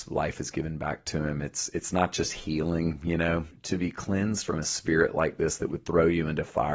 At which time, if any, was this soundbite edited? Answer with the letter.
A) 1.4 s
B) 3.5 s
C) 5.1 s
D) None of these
B